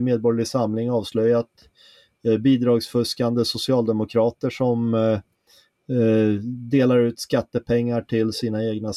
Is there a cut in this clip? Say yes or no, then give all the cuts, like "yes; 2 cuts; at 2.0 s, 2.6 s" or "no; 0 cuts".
no; 0 cuts